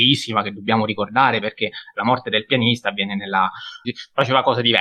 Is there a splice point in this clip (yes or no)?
yes